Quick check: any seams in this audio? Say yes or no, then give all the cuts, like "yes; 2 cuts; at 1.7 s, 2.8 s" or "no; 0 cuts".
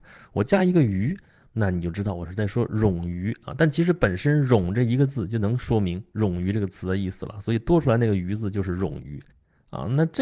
no; 0 cuts